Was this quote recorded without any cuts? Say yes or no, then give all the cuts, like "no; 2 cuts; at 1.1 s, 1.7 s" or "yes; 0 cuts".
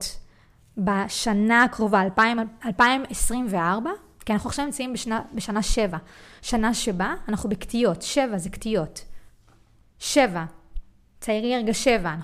yes; 0 cuts